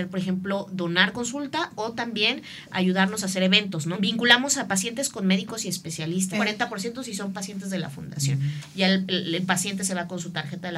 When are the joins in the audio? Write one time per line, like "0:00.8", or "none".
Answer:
0:03.9
0:06.3